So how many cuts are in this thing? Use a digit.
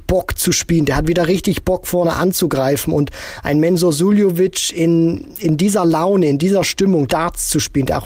1